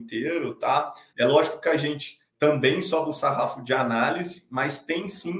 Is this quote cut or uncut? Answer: cut